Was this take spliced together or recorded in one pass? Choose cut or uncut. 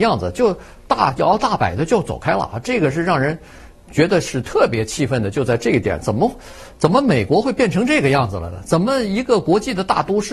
uncut